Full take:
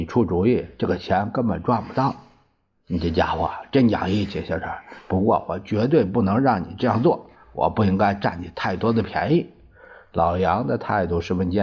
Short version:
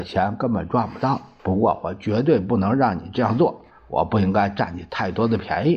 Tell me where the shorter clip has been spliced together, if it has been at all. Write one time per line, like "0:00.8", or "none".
0:01.4